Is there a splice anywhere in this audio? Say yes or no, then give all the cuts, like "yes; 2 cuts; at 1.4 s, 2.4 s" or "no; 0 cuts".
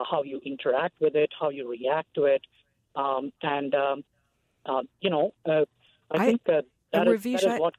no; 0 cuts